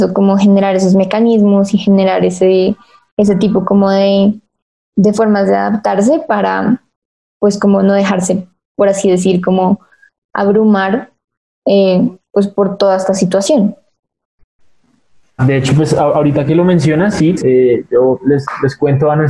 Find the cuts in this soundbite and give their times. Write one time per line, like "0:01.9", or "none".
0:15.4
0:17.3